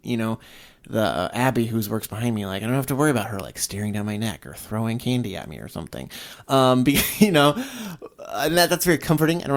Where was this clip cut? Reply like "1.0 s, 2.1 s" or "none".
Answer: none